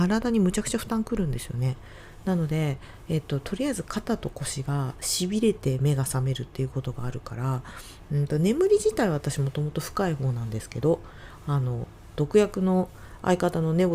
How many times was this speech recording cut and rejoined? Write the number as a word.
zero